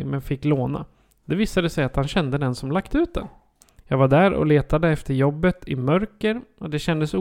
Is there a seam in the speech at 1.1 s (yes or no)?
no